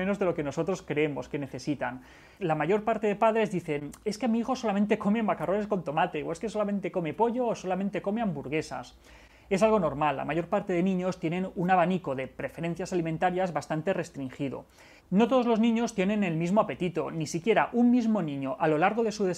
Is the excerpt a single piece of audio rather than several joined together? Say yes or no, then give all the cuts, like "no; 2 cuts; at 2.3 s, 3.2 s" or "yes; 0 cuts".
no; 2 cuts; at 2.4 s, 15.0 s